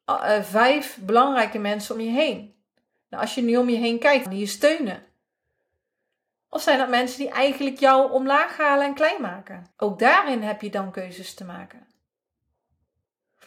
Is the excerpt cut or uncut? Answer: cut